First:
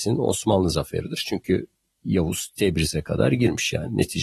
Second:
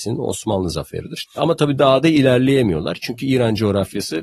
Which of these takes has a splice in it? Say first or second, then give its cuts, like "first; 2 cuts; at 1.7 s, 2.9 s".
second; 1 cut; at 1.2 s